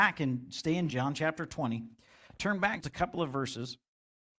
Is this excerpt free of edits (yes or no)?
no